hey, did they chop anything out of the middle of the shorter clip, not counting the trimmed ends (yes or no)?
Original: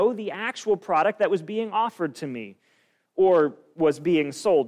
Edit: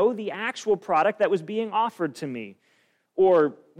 no